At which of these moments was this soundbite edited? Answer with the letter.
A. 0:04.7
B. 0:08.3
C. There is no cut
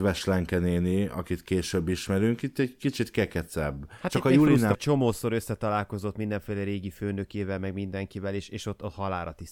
A